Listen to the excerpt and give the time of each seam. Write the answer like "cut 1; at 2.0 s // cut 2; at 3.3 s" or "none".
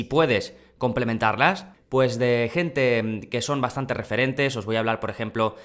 cut 1; at 1.7 s